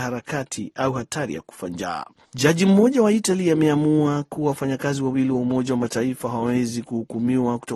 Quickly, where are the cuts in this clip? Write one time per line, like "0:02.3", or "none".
0:02.2